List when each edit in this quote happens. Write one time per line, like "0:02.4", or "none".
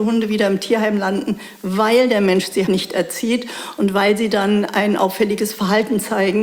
0:02.7